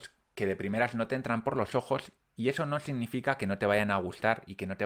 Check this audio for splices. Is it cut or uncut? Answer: uncut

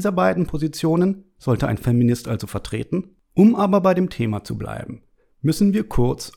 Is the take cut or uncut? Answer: cut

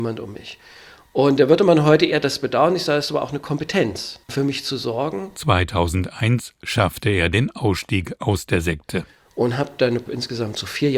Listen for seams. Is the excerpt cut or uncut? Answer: cut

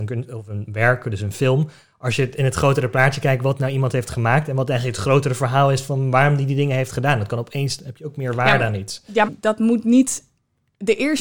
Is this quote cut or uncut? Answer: cut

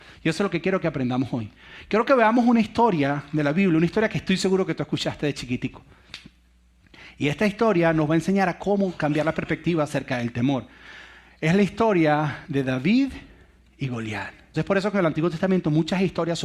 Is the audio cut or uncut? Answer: cut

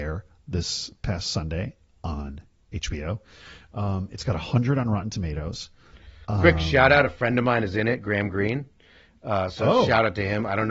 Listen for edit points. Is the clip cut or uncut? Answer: uncut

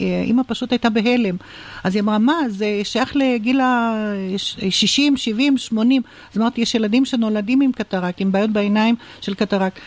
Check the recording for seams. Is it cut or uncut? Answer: cut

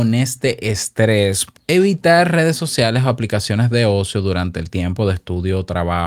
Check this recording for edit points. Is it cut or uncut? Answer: cut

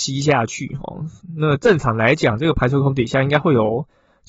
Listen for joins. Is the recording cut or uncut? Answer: uncut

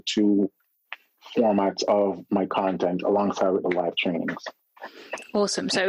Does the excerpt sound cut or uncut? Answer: uncut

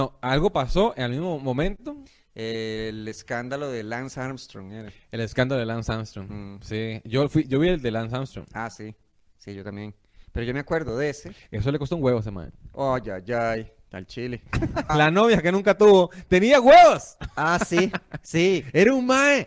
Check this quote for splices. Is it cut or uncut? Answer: cut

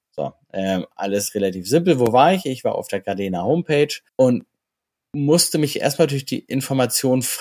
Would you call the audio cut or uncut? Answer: cut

